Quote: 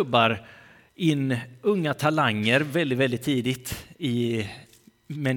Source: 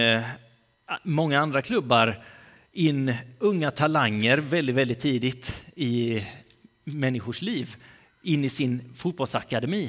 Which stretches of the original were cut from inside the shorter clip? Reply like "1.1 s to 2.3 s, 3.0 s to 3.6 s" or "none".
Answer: none